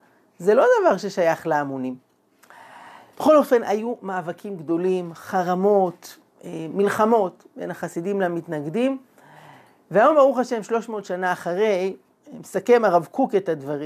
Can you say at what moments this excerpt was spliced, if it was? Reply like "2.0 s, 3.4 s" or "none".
none